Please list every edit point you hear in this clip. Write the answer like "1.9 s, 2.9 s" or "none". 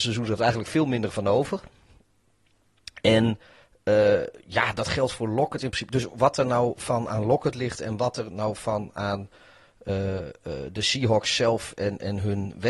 none